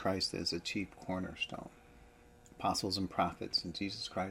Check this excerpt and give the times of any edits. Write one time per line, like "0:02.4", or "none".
none